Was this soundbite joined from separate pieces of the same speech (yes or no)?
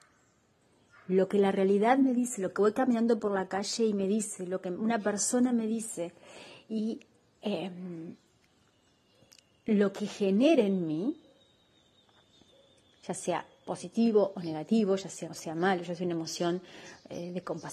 yes